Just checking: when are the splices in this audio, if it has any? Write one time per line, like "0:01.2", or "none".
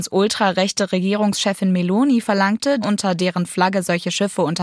0:02.8